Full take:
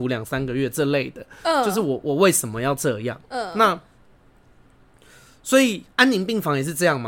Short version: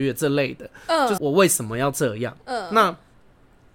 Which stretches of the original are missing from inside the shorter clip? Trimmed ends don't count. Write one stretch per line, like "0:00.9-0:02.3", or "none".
0:01.7-0:02.0